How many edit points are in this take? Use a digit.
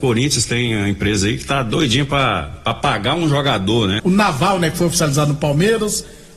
1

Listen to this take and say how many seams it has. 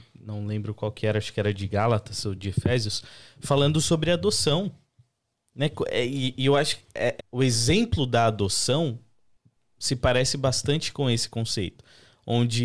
1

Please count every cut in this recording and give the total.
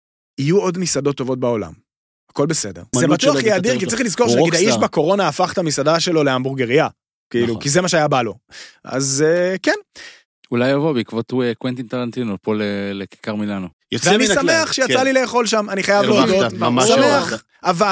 2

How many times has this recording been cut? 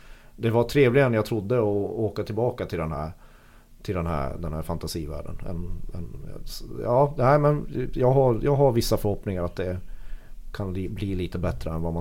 1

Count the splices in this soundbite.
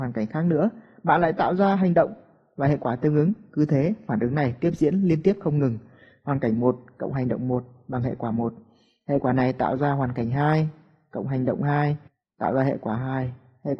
0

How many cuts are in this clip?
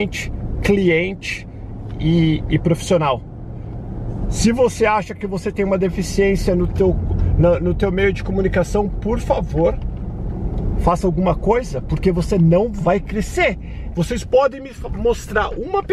1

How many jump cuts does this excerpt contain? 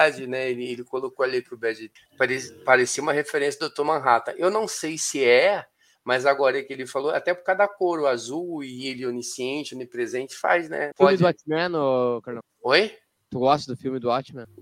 1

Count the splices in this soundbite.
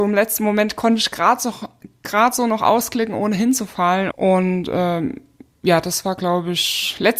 1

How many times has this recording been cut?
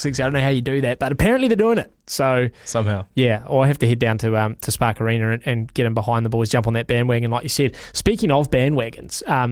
0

